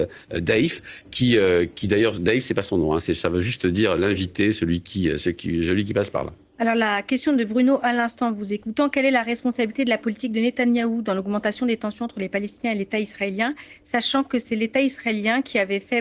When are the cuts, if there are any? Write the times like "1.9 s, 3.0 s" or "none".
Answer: none